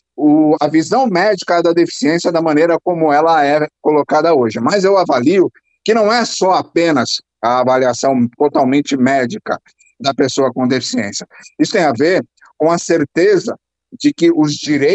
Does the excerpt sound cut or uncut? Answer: uncut